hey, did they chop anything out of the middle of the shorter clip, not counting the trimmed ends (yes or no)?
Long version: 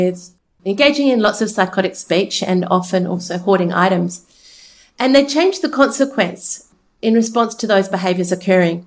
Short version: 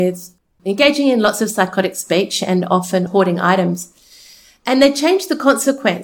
yes